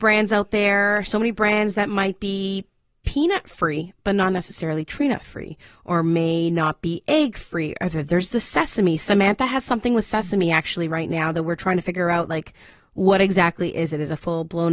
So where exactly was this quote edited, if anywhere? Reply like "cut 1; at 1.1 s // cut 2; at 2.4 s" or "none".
none